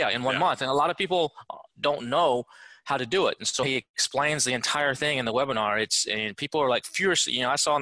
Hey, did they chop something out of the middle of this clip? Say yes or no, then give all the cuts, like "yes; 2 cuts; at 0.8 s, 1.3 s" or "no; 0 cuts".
yes; 1 cut; at 3.6 s